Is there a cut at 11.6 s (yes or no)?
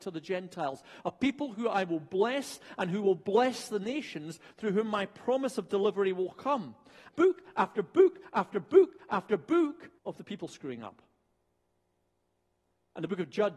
no